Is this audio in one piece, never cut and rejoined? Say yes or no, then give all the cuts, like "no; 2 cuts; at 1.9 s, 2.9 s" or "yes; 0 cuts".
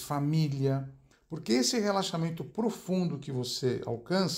no; 1 cut; at 1.1 s